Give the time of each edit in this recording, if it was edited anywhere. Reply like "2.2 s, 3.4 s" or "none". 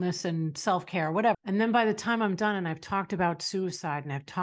1.3 s